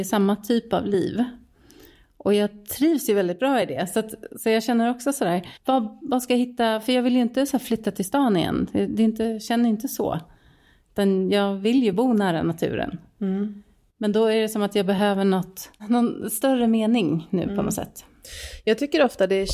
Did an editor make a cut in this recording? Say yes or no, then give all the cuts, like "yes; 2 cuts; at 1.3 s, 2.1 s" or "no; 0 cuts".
no; 0 cuts